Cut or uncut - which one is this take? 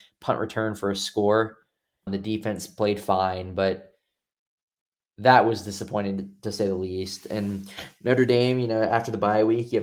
cut